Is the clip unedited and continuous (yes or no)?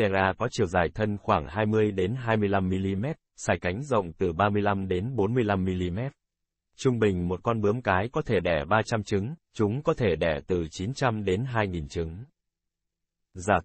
no